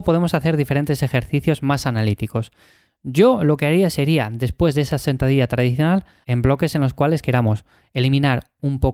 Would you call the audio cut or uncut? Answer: cut